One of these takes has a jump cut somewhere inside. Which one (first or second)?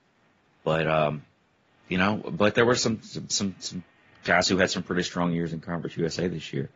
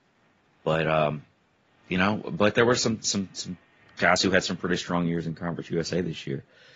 second